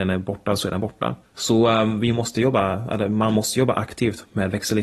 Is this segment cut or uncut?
uncut